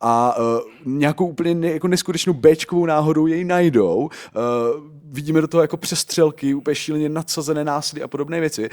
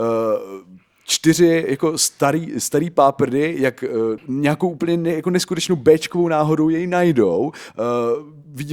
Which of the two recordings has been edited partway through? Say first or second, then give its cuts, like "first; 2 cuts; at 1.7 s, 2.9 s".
second; 1 cut; at 4.2 s